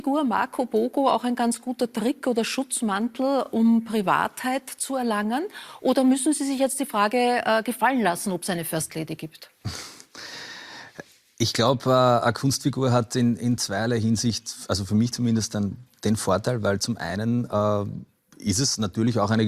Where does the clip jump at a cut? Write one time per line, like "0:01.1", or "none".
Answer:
none